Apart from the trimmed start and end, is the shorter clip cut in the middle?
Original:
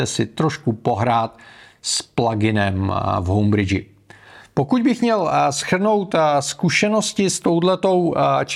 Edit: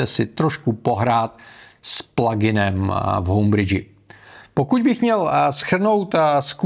no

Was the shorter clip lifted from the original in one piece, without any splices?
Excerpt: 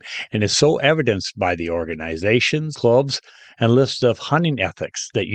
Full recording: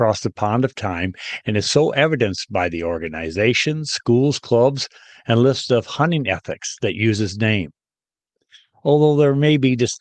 no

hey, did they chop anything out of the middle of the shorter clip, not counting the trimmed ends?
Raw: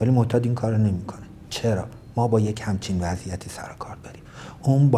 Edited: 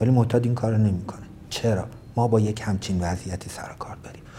no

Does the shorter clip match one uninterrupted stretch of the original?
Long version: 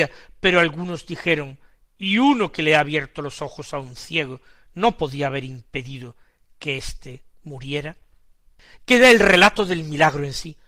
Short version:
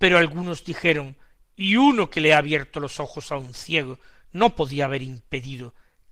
yes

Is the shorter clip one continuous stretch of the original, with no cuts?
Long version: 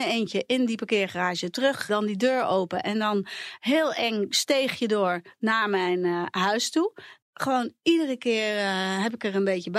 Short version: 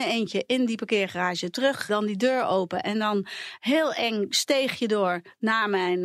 yes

